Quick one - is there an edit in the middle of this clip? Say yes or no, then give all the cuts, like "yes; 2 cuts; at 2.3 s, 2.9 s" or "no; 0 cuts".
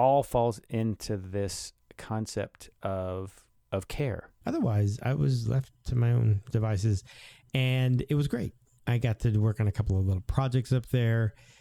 yes; 1 cut; at 4.4 s